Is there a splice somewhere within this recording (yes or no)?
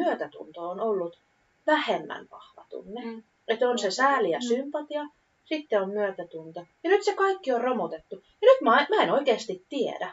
yes